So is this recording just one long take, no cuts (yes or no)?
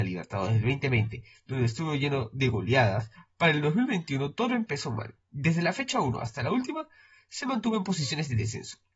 yes